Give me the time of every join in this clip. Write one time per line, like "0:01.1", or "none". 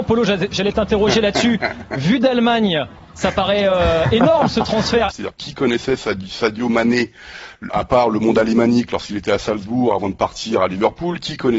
0:05.1
0:07.7